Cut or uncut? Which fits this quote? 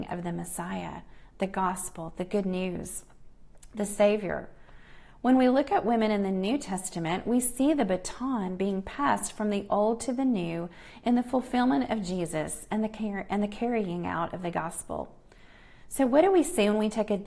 uncut